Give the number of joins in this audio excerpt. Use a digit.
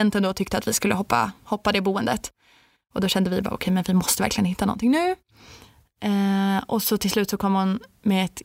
0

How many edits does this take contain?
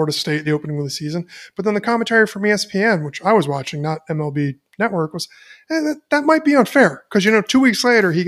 0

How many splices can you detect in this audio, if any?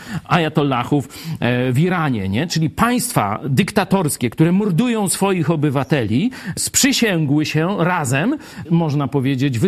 2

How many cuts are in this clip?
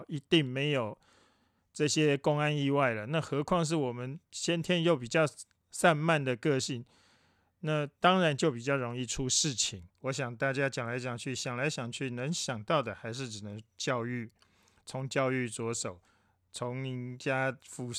1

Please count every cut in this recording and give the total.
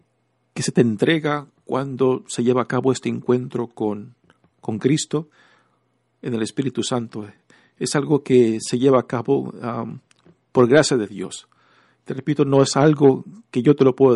0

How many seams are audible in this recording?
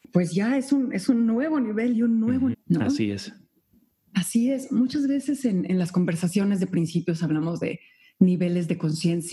1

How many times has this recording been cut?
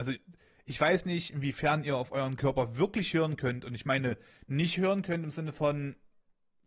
0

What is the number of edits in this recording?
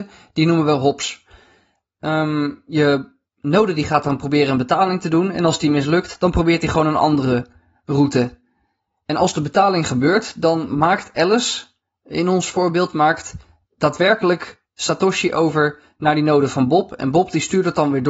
0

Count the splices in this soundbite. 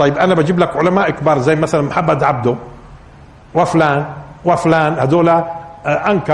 0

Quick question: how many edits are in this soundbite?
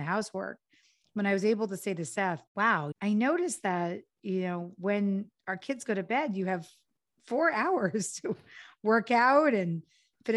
1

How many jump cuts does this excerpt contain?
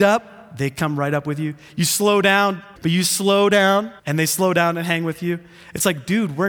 2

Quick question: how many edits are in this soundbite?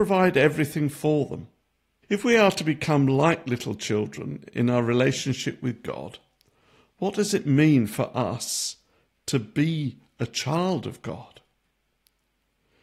1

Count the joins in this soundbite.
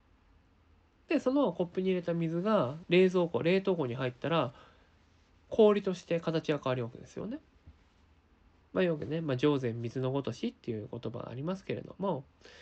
2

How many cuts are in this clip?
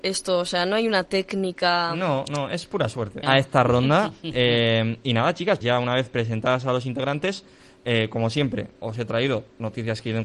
2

